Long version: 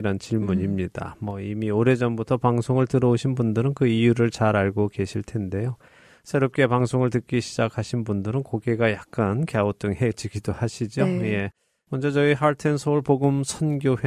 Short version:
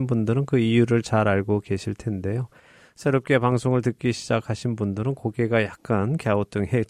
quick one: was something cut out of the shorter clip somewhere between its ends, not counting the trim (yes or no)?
no